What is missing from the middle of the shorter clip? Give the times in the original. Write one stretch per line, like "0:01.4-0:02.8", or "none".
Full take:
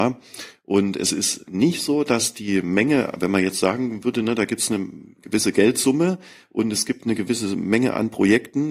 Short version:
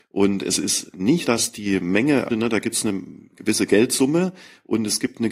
0:01.8-0:02.0
0:03.1-0:04.2